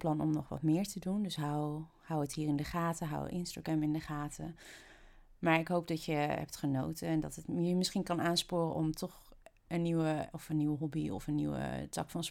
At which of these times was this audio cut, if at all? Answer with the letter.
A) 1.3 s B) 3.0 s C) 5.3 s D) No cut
D